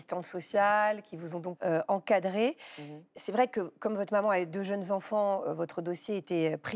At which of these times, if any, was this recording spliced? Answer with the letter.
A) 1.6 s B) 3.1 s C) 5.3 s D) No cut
A